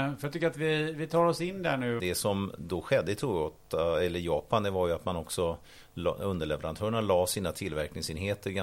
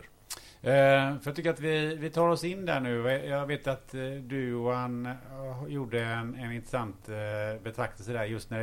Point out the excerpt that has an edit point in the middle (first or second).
first